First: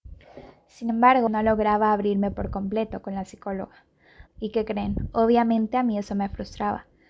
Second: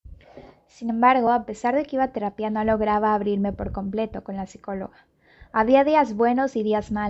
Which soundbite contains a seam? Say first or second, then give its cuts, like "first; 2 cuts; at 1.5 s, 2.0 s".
first; 2 cuts; at 1.3 s, 4.3 s